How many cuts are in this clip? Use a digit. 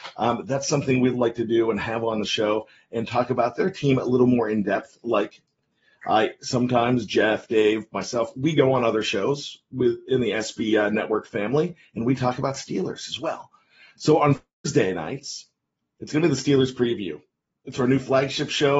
0